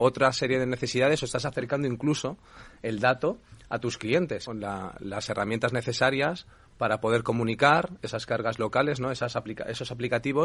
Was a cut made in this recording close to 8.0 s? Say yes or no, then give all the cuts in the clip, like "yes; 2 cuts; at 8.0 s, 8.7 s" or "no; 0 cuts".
yes; 2 cuts; at 4.5 s, 8.0 s